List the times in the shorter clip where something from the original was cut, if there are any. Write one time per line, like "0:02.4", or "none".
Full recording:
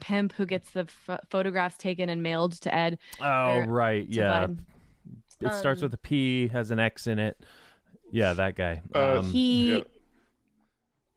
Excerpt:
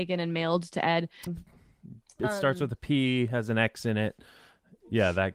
0:01.3